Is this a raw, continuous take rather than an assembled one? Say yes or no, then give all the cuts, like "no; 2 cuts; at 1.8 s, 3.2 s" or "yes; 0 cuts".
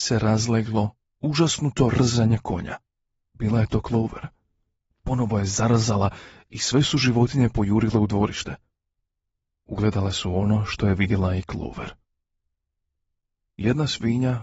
yes; 0 cuts